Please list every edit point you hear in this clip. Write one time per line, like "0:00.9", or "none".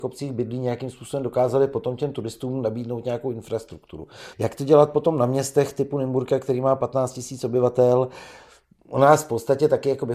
0:04.3